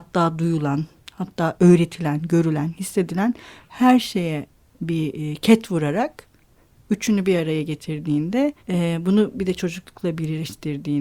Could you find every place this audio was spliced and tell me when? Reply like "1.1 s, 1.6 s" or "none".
8.6 s